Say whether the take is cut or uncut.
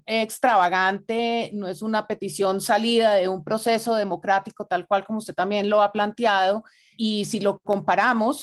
uncut